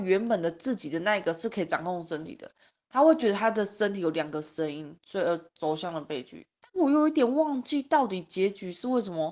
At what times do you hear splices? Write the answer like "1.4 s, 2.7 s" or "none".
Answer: 6.6 s